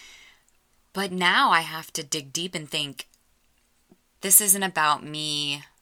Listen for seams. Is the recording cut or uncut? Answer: uncut